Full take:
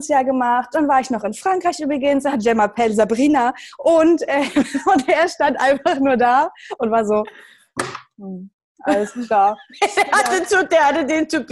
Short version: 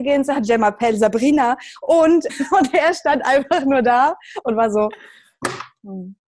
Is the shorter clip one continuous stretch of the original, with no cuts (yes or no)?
no